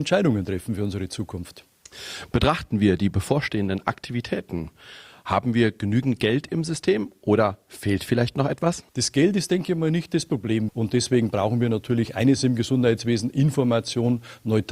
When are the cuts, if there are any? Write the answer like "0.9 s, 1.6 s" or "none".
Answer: 8.9 s, 10.7 s